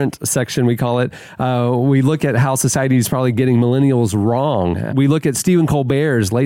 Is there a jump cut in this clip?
no; 0 cuts

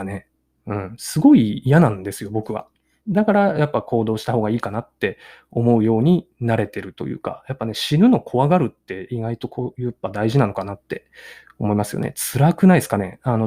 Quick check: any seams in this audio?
yes; 1 cut; at 3.0 s

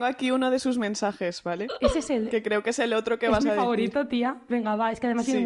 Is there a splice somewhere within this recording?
no; 0 cuts

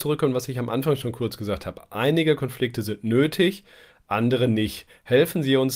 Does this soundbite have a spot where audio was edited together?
no; 0 cuts

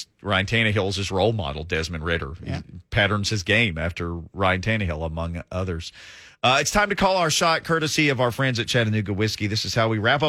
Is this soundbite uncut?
yes; 0 cuts

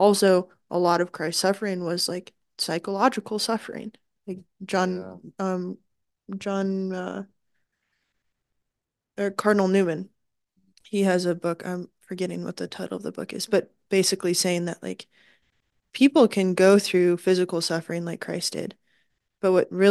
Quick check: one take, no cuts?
yes; 0 cuts

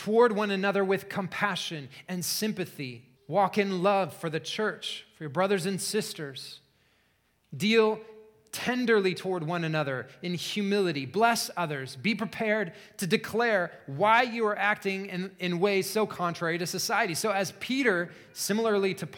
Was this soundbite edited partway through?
yes; 1 cut; at 3.2 s

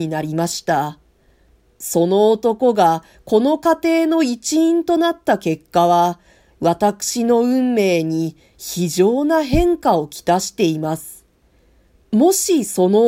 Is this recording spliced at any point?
no; 0 cuts

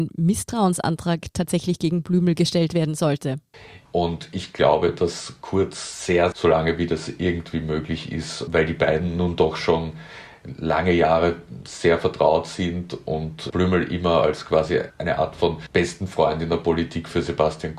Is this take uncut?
no; 2 cuts; at 3.9 s, 6.3 s

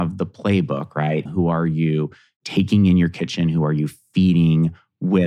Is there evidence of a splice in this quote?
yes; 1 cut; at 1.3 s

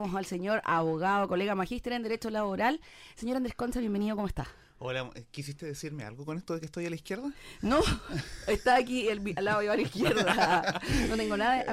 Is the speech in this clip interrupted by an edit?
no; 0 cuts

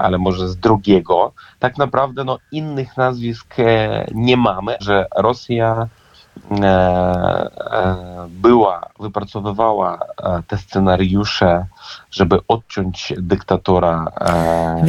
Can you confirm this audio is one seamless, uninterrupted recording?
no; 1 cut; at 4.8 s

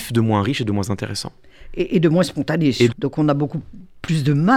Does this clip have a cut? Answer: yes; 1 cut; at 2.9 s

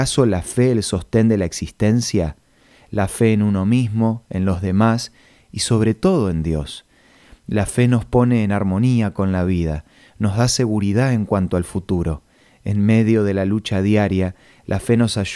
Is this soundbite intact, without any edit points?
yes; 0 cuts

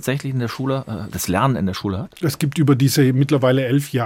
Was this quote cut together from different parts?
yes; 1 cut; at 1.1 s

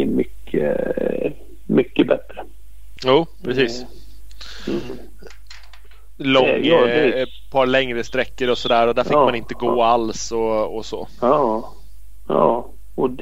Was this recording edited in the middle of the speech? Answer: yes; 1 cut; at 3.0 s

